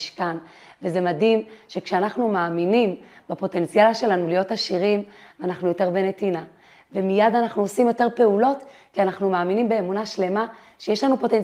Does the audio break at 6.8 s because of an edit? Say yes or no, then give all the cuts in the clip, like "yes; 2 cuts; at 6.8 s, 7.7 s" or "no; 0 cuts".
no; 1 cut; at 5.3 s